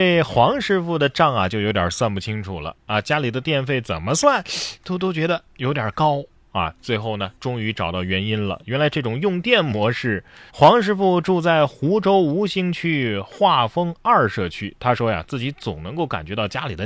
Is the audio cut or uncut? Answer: cut